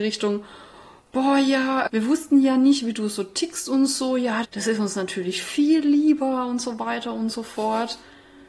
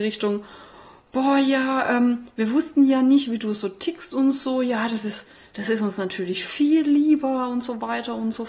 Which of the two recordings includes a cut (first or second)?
first